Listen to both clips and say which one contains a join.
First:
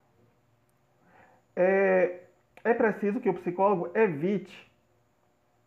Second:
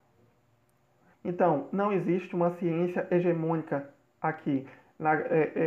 second; 1 cut; at 1.1 s

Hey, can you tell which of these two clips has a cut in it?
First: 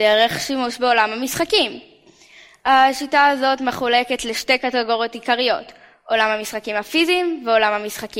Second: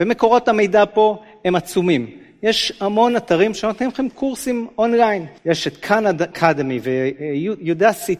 second; 1 cut; at 5.4 s

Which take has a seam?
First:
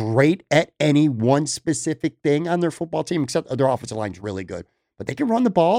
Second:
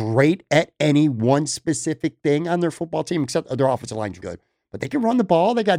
second; 1 cut; at 4.2 s

